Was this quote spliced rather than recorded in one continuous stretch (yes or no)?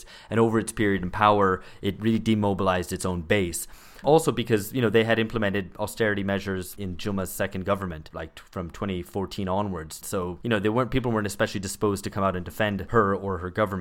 yes